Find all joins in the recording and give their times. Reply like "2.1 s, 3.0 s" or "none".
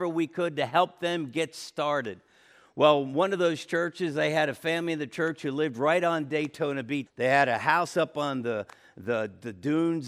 7.1 s